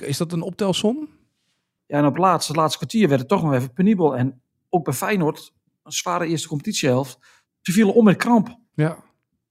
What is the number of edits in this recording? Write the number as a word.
one